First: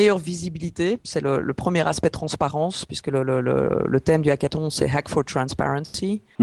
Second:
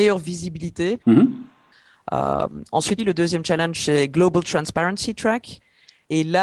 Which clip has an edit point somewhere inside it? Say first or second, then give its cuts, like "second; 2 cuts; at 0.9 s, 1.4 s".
second; 2 cuts; at 1.0 s, 3.0 s